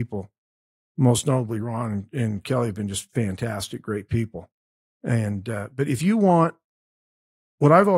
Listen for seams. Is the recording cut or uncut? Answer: uncut